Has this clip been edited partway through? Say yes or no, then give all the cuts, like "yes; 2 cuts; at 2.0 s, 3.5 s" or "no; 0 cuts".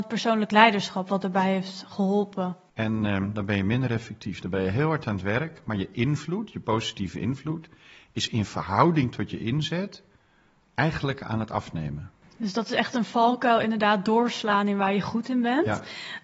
yes; 1 cut; at 2.7 s